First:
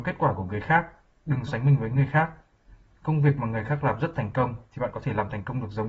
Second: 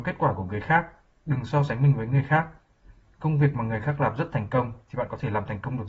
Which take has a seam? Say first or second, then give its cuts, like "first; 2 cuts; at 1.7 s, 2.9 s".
first; 1 cut; at 1.5 s